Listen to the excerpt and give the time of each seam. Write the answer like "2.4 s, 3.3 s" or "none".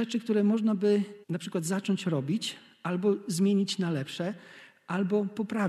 1.2 s